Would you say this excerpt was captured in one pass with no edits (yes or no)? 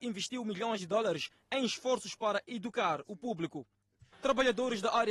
no